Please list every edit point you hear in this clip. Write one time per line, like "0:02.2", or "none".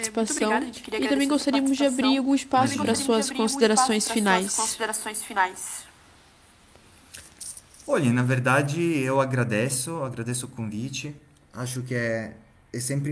none